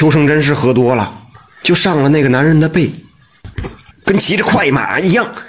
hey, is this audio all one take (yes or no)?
no